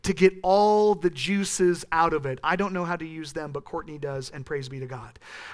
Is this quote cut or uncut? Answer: uncut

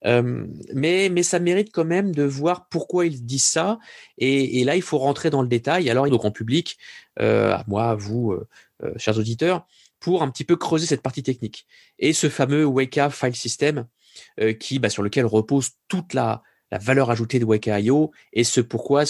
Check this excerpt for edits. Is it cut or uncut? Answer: cut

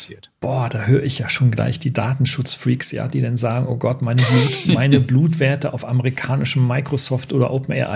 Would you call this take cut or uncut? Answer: uncut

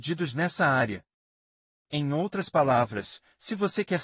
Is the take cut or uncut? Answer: uncut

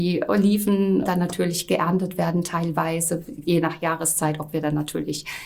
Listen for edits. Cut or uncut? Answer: cut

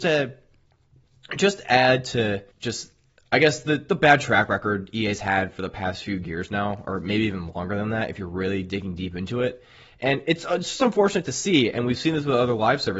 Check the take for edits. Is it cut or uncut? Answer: cut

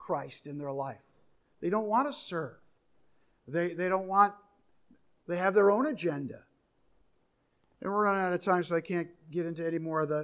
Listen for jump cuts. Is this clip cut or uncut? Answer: uncut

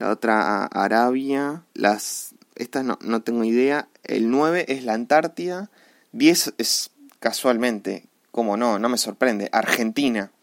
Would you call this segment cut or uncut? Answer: cut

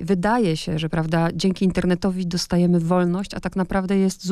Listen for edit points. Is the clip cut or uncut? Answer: uncut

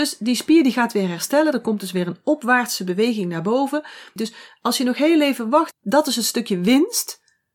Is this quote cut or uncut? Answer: cut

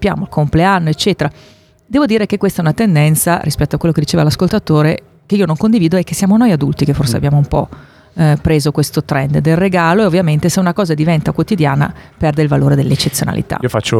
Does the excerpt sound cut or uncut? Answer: uncut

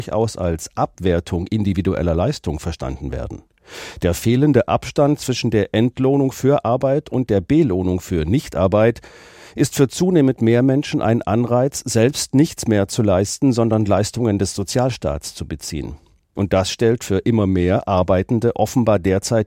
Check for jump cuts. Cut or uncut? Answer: uncut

